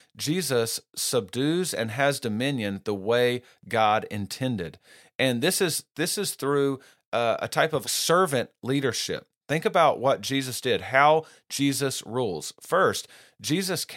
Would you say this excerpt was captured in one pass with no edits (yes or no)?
no